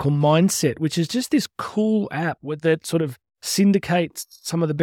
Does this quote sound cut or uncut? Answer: cut